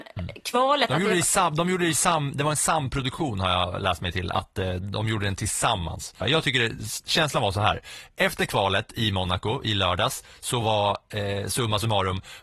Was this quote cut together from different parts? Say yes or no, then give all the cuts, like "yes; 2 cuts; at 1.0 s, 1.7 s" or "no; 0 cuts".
yes; 1 cut; at 6.2 s